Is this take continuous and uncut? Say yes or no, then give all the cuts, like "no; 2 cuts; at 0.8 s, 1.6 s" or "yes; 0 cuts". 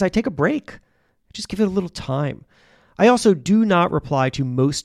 yes; 0 cuts